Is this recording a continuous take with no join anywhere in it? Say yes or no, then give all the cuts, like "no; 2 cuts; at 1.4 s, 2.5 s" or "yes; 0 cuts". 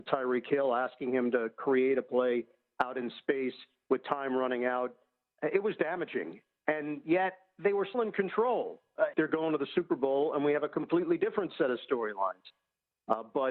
no; 2 cuts; at 7.9 s, 9.1 s